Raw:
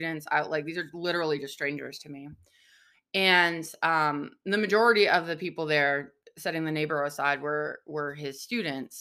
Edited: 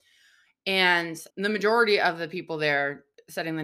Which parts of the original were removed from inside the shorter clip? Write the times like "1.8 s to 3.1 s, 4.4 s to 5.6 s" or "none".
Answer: 3.8 s to 4.4 s